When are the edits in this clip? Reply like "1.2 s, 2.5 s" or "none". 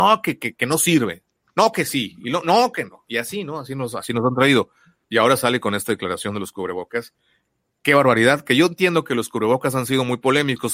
5.0 s